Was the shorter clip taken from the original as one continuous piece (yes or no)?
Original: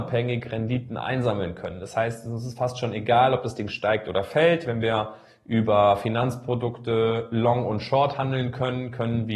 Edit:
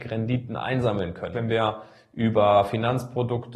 no